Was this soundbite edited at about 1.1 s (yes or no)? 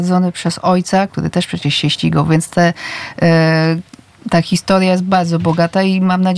yes